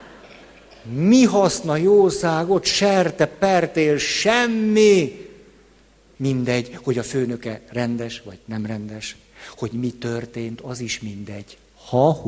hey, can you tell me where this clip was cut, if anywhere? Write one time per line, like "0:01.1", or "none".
0:06.2